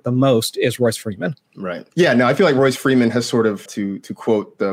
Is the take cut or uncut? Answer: cut